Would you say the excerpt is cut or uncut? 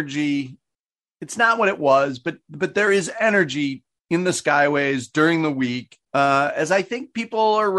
cut